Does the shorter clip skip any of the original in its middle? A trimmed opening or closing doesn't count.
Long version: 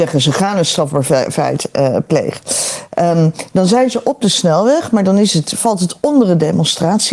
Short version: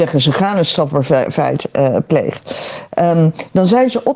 no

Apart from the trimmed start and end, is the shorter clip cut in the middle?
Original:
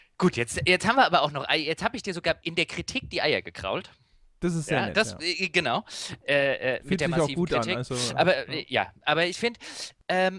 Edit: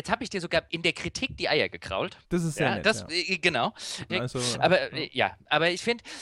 yes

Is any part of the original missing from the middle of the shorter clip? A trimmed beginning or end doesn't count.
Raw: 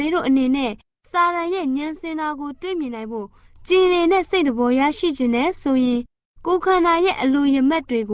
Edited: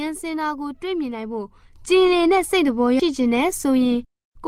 yes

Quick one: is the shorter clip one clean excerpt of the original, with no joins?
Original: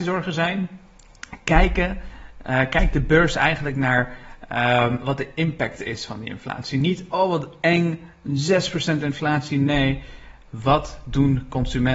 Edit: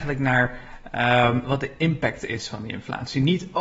yes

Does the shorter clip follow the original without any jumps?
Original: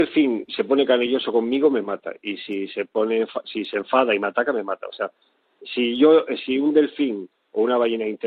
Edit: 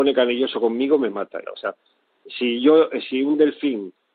no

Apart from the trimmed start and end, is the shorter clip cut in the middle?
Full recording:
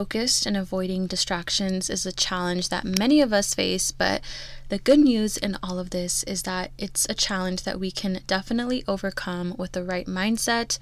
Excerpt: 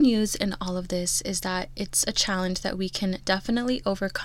no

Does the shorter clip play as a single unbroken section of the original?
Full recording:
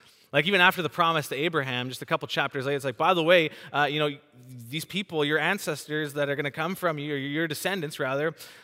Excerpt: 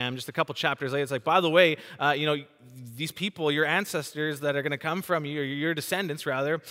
yes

